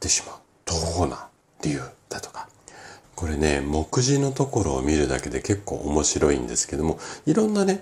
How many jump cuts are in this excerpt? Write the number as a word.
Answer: one